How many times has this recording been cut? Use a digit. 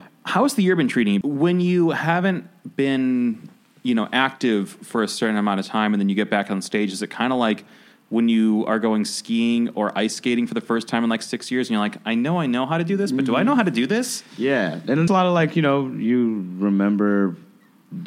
2